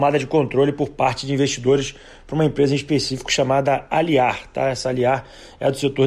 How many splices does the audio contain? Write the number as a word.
zero